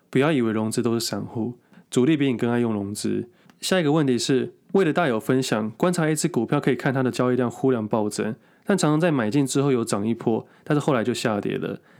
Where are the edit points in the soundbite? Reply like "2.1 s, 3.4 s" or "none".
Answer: none